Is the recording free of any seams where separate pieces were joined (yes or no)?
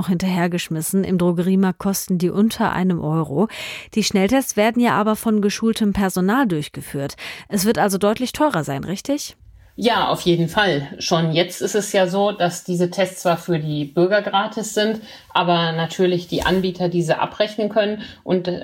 yes